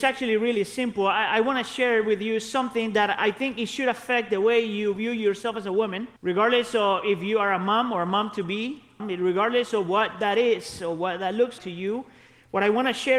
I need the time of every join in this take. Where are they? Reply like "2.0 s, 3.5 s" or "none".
6.2 s, 9.0 s, 11.6 s